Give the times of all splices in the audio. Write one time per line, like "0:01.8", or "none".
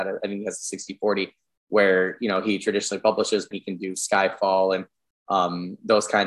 0:03.5